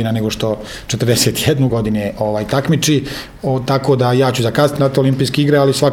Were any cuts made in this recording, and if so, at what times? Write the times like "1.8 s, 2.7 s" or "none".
1.7 s, 4.8 s

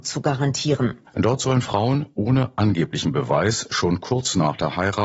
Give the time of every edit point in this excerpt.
1.1 s

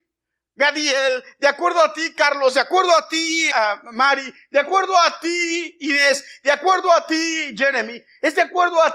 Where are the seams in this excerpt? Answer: 3.5 s

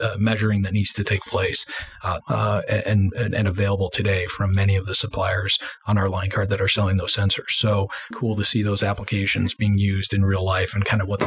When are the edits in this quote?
2.2 s, 8.1 s

